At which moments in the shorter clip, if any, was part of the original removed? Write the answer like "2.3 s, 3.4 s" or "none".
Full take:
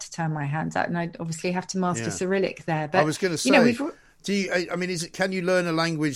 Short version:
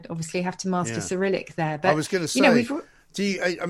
none